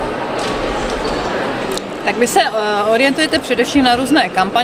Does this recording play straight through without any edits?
no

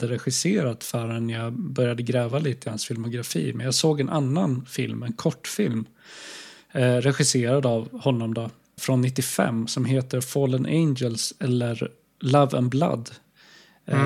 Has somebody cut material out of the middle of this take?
yes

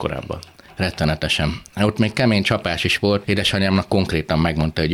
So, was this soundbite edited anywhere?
yes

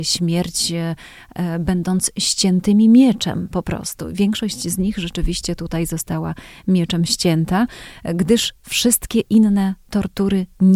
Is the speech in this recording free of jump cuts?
yes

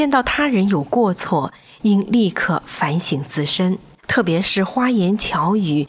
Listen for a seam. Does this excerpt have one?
yes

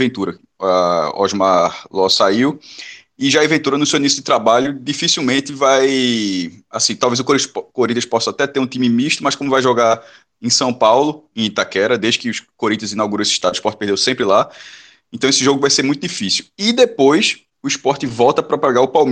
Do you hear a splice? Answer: yes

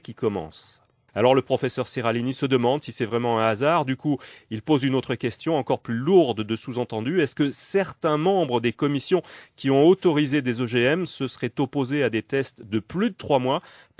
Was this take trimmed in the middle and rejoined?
yes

